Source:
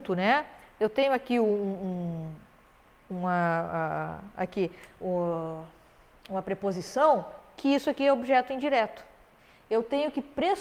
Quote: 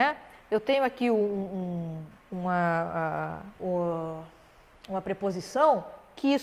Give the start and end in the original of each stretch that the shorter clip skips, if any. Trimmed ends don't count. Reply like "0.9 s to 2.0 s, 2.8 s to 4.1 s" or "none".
2.5 s to 3.0 s, 4.3 s to 4.9 s